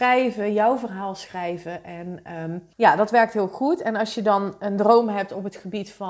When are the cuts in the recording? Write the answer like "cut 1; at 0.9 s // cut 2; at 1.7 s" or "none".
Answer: cut 1; at 2.7 s